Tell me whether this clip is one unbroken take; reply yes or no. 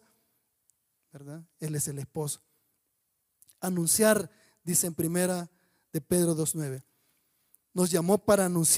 yes